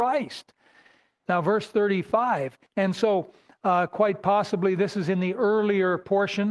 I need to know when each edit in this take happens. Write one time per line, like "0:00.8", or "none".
0:01.3
0:02.7